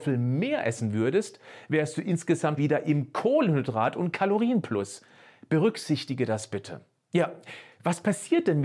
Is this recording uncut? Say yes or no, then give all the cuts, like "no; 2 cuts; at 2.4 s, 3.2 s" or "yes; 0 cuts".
no; 1 cut; at 2.6 s